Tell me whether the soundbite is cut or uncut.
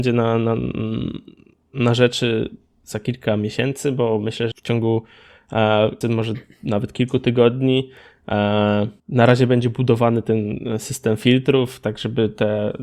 cut